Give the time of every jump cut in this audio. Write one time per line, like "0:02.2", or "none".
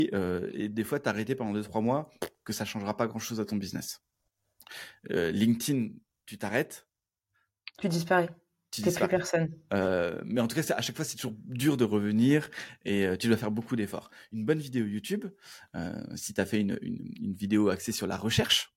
0:09.7